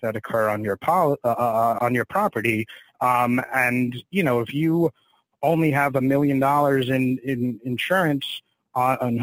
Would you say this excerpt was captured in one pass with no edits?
yes; 0 cuts

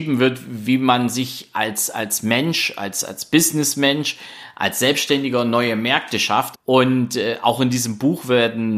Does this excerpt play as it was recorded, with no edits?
no; 1 cut; at 6.5 s

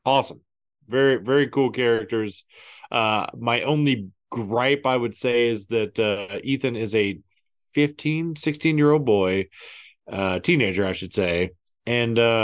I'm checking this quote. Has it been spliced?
no; 0 cuts

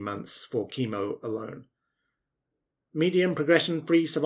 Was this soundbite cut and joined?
no; 0 cuts

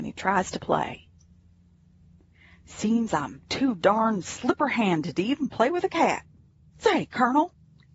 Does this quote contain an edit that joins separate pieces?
no; 0 cuts

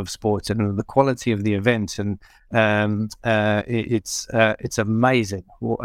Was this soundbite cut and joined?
no; 0 cuts

